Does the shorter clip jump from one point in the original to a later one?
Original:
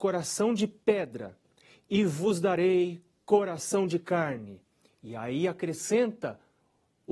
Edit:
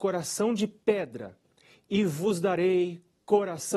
no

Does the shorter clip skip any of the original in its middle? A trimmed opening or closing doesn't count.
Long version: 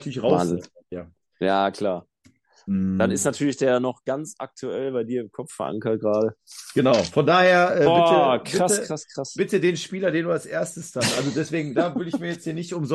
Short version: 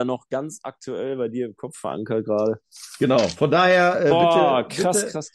no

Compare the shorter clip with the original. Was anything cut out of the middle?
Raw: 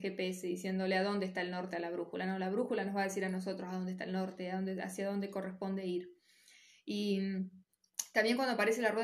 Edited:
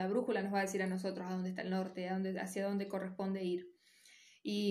no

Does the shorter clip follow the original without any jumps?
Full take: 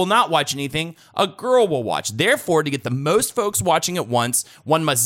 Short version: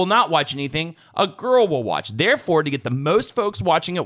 yes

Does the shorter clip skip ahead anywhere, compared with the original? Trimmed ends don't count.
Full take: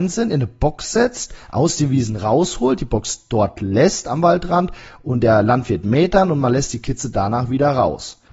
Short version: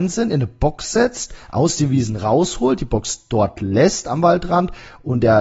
no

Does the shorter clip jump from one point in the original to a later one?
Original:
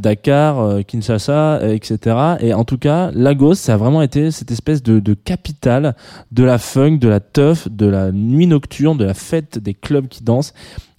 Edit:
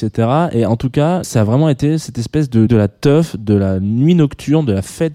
yes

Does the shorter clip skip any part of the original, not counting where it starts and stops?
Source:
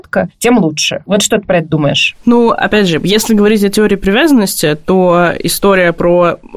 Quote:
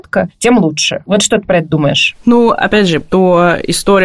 yes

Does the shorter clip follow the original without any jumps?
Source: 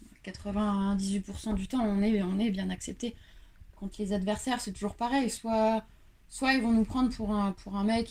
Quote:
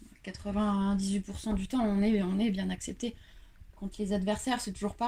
yes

